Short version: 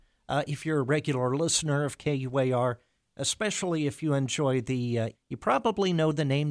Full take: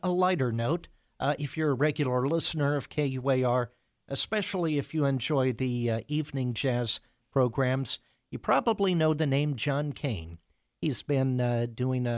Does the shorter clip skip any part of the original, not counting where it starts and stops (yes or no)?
yes